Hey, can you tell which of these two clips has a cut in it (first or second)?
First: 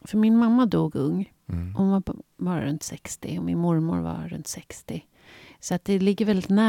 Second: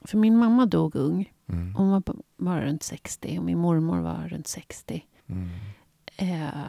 second